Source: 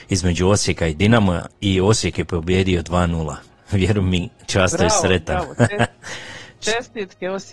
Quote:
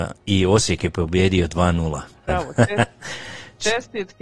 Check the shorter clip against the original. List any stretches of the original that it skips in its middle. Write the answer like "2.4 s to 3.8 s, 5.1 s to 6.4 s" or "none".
3.6 s to 5.3 s